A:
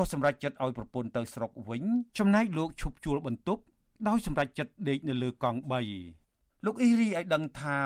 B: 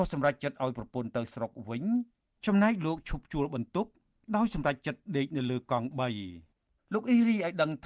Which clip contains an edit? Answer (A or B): A